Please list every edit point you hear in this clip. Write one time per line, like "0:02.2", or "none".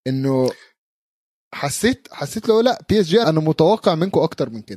0:03.2